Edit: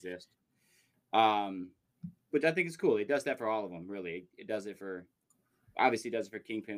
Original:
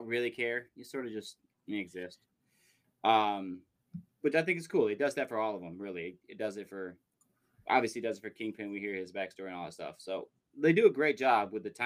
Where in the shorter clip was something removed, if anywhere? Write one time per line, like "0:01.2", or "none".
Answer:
none